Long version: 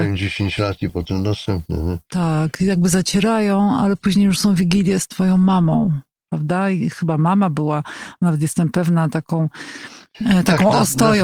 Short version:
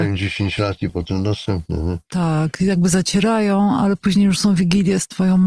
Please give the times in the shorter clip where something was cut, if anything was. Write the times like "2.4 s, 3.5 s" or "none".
none